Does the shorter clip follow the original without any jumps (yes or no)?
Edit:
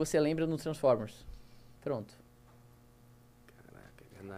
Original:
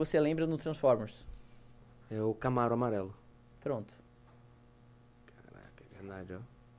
no